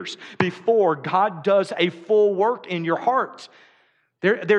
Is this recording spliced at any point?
no; 0 cuts

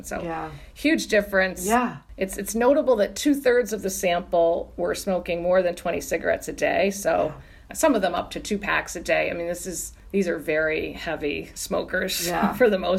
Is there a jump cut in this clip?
no; 0 cuts

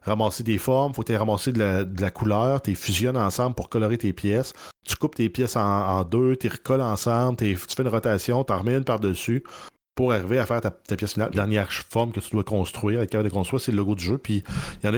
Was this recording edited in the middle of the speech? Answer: yes; 1 cut; at 11.3 s

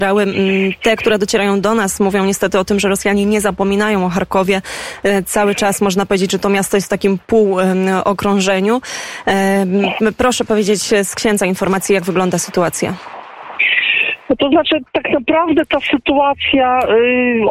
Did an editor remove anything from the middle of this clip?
no; 0 cuts

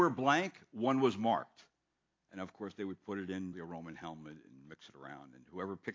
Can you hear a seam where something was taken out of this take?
yes; 1 cut; at 3.5 s

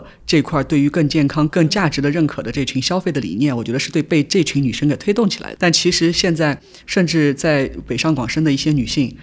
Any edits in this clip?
yes; 3 cuts; at 1.5 s, 5.6 s, 6.8 s

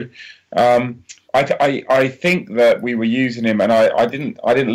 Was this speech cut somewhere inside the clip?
no; 0 cuts

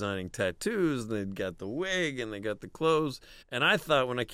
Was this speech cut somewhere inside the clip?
yes; 1 cut; at 3.4 s

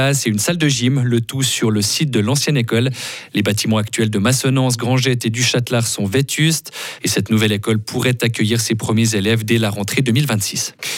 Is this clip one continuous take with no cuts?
no; 1 cut; at 7.0 s

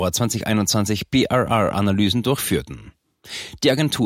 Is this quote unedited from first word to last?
yes; 0 cuts

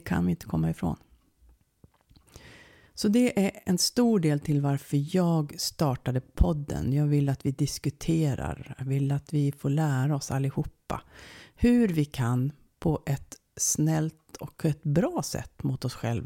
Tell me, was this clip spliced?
no; 0 cuts

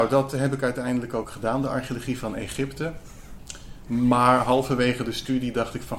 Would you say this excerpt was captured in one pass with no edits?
yes; 0 cuts

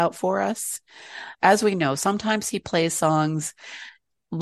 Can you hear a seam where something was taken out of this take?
yes; 1 cut; at 1.4 s

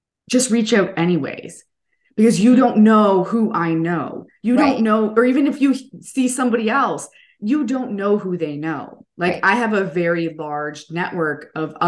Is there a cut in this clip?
no; 0 cuts

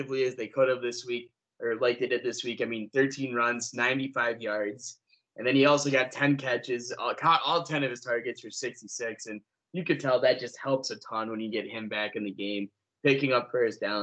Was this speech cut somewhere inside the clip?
no; 0 cuts

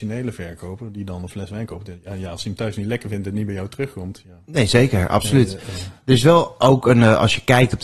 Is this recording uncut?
yes; 0 cuts

